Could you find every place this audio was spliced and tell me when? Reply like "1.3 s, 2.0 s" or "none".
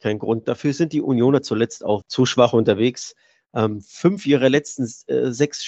2.0 s